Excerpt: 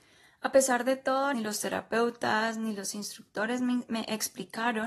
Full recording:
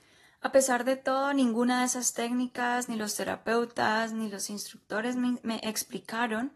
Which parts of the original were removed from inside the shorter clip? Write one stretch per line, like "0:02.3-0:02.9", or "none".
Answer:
0:01.3-0:02.9